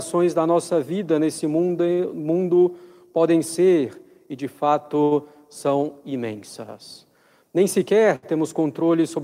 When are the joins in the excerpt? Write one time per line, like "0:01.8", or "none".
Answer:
none